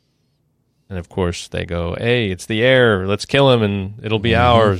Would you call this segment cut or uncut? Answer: uncut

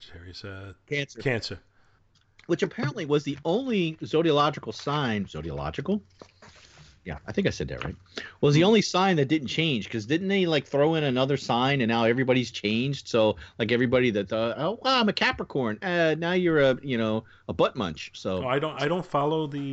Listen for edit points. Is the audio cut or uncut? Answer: cut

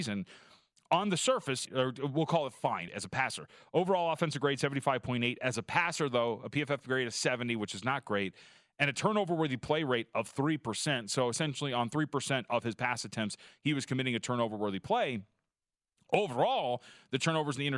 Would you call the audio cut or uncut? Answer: cut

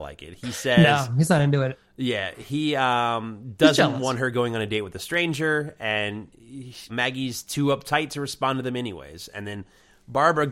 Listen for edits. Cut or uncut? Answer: cut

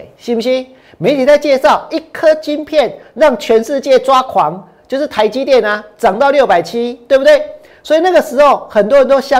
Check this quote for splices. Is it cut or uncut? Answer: uncut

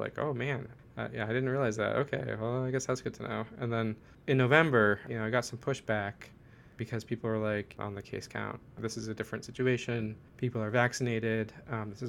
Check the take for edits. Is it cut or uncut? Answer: cut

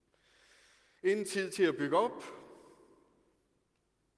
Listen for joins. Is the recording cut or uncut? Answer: uncut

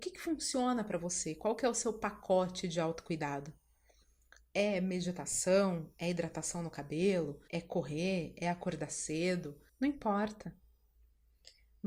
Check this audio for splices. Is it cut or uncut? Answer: cut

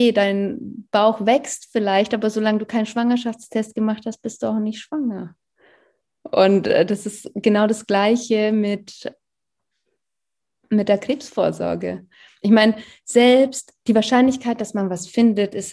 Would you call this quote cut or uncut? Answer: uncut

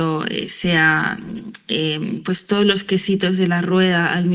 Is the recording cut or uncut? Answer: uncut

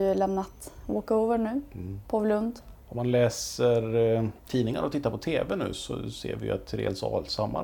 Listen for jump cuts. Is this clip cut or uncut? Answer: cut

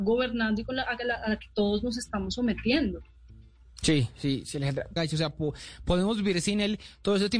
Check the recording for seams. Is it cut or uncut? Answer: cut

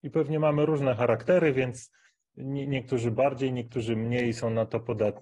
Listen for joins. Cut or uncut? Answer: uncut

